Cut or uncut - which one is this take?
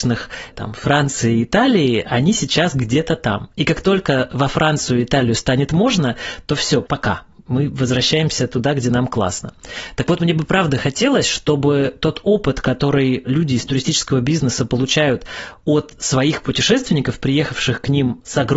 uncut